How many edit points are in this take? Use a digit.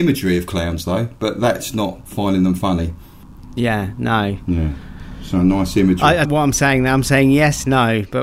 1